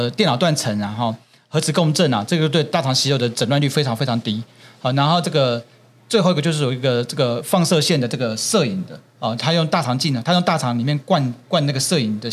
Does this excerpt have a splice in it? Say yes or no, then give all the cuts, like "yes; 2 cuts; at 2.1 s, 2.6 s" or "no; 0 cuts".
no; 0 cuts